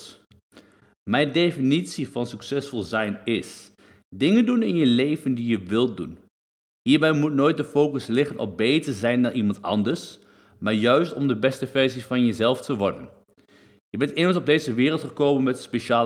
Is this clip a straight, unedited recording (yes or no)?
yes